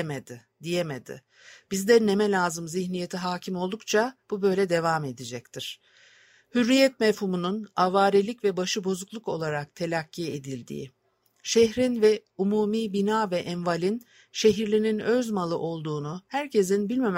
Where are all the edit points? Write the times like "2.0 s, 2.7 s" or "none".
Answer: none